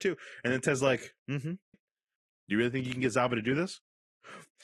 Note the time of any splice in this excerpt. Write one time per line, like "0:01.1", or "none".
0:01.7